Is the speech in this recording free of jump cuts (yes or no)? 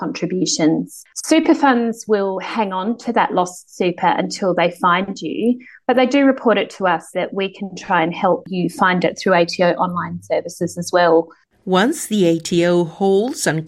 no